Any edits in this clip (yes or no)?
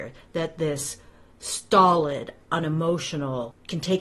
no